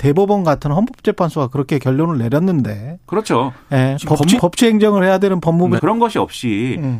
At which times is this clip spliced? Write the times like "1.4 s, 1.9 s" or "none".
4.4 s, 5.8 s